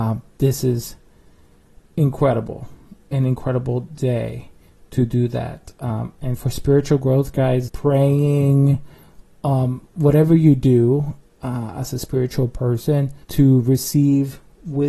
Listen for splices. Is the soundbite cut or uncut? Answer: cut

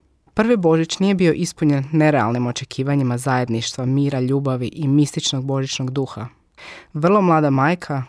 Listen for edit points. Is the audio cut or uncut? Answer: uncut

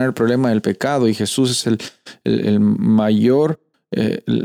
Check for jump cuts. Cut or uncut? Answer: uncut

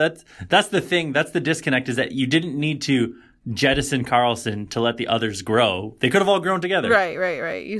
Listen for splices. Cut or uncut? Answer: uncut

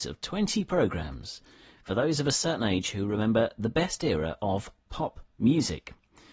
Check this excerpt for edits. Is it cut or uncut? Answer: uncut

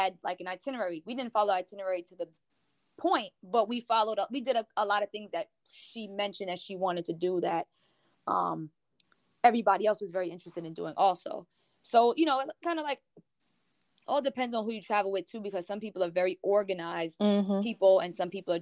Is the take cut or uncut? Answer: uncut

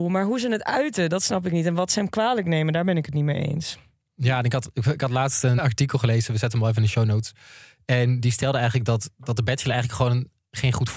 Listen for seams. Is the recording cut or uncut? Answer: cut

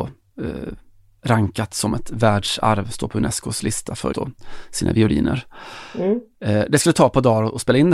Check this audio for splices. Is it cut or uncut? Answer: cut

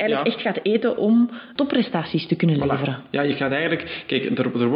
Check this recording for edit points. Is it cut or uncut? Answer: cut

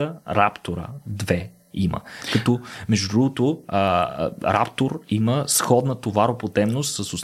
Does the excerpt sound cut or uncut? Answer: uncut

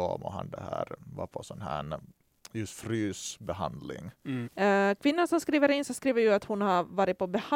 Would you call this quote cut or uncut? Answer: cut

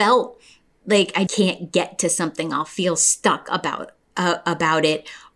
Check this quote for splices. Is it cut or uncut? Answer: cut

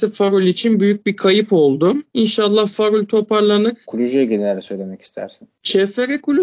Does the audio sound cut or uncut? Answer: cut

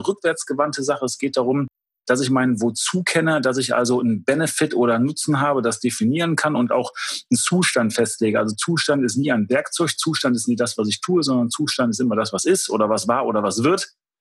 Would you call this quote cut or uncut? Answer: uncut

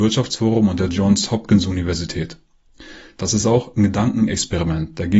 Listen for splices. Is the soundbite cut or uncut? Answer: uncut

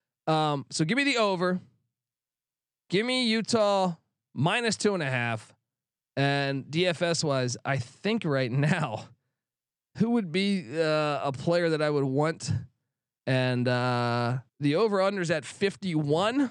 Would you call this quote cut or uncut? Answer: cut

